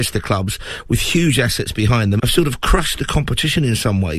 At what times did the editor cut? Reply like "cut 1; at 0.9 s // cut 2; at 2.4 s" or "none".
cut 1; at 2.2 s